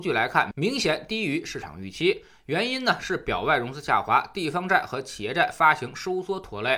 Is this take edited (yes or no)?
no